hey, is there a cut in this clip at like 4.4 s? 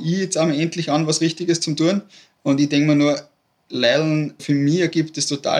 yes; 1 cut; at 4.4 s

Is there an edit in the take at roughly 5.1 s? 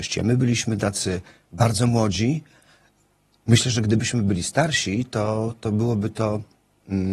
no; 0 cuts

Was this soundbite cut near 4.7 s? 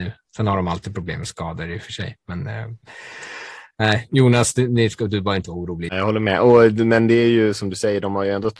no; 1 cut; at 5.9 s

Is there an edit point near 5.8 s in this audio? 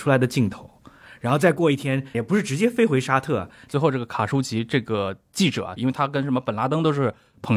yes; 3 cuts; at 2.1 s, 3.7 s, 5.8 s

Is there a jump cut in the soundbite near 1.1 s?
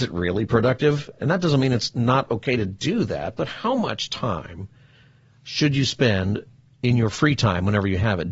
no; 0 cuts

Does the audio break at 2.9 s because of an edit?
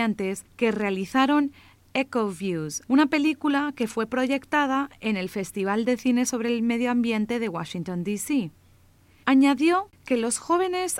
yes; 2 cuts; at 2.9 s, 9.2 s

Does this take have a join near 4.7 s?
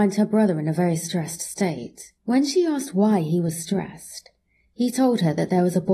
no; 1 cut; at 2.2 s

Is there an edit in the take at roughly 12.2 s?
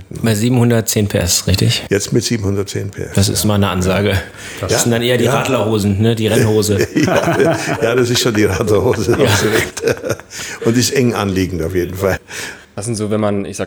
yes; 1 cut; at 12.2 s

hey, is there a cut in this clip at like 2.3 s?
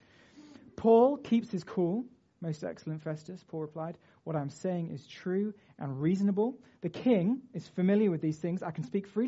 yes; 1 cut; at 2.3 s

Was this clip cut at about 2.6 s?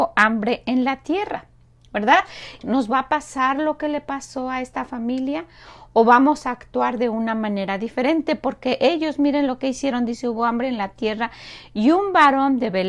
yes; 1 cut; at 2.6 s

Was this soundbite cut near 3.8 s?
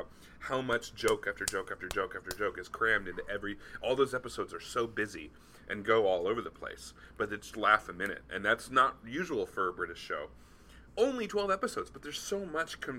no; 2 cuts; at 7.5 s, 10.9 s

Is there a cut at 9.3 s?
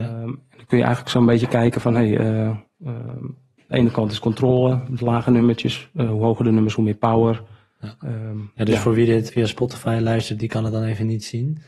yes; 1 cut; at 9.3 s

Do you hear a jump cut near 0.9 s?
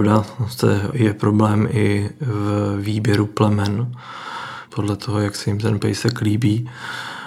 yes; 2 cuts; at 0.9 s, 4.7 s

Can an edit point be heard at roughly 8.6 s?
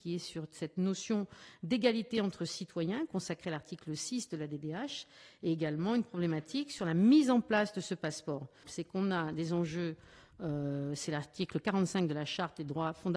yes; 1 cut; at 8.6 s

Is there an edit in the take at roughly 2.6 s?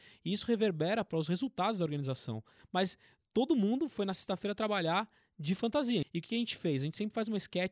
yes; 2 cuts; at 2.6 s, 6.0 s

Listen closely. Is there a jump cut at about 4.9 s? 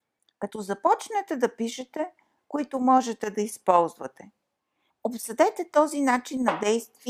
yes; 2 cuts; at 2.4 s, 4.9 s

